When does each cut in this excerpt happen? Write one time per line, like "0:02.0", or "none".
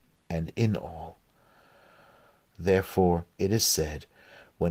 0:02.5